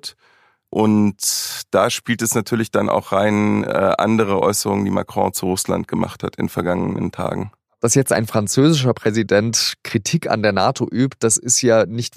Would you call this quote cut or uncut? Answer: uncut